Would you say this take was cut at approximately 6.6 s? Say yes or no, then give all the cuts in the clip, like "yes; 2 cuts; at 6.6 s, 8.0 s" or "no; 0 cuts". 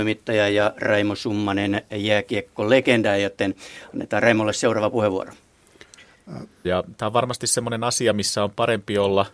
yes; 1 cut; at 6.6 s